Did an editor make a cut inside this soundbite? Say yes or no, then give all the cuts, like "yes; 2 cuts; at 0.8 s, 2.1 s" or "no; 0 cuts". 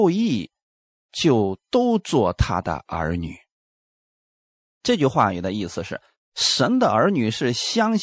no; 0 cuts